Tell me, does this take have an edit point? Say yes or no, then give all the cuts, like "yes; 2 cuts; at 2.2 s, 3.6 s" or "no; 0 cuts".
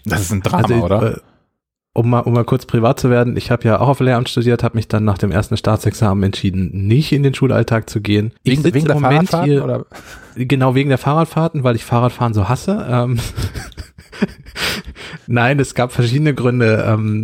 yes; 1 cut; at 8.4 s